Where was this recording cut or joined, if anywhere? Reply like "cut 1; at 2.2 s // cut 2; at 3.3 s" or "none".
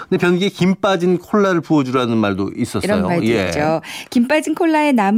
none